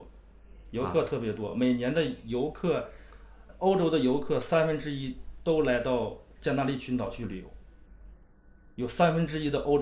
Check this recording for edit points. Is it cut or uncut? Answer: uncut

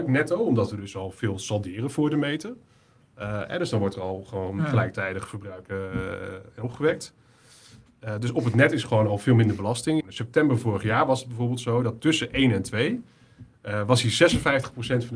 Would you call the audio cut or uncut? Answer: cut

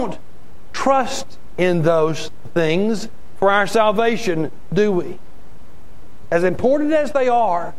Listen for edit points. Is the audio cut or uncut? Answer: uncut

